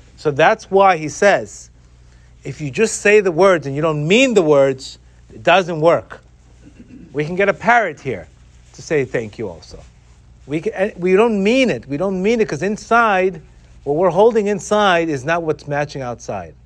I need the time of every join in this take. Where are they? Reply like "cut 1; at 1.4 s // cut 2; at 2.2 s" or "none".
none